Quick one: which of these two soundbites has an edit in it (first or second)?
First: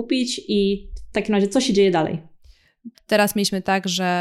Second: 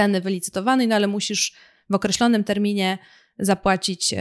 first